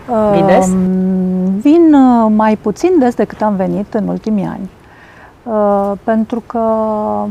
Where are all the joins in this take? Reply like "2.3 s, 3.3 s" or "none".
none